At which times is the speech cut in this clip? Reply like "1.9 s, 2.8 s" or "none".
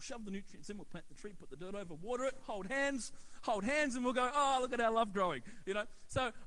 none